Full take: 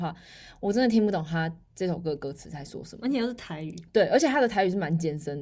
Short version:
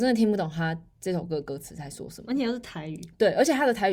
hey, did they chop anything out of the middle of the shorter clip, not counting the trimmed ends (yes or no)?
no